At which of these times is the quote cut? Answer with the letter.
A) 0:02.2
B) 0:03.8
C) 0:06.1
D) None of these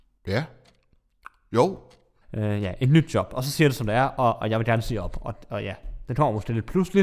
A